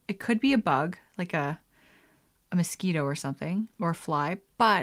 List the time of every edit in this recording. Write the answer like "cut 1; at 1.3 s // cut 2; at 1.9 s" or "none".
cut 1; at 3.7 s

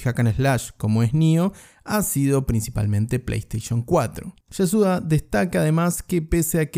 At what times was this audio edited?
cut 1; at 4.4 s

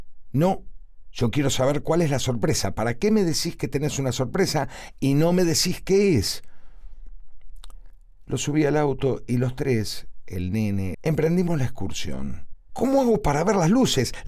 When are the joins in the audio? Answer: cut 1; at 10.9 s // cut 2; at 12.7 s

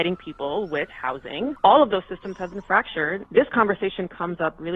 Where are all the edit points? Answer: cut 1; at 1.6 s // cut 2; at 3.3 s

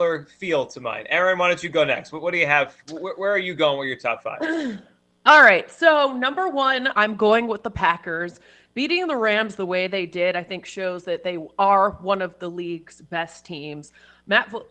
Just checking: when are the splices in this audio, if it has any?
none

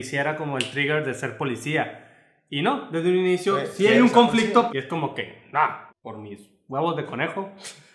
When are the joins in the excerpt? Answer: cut 1; at 4.7 s // cut 2; at 5.9 s

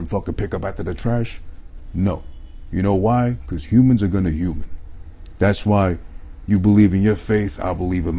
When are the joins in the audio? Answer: none

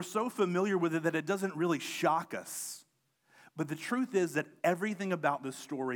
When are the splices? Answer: none

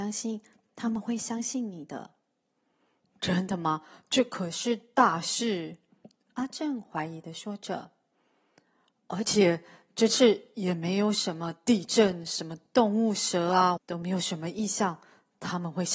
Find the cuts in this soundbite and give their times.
cut 1; at 13.8 s

